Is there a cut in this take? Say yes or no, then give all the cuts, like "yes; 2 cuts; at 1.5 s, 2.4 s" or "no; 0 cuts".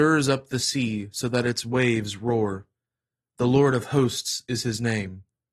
no; 0 cuts